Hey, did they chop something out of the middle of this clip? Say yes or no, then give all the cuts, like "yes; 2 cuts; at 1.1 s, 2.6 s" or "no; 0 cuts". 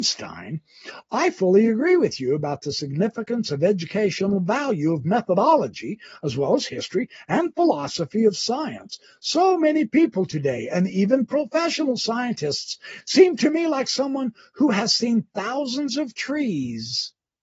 no; 0 cuts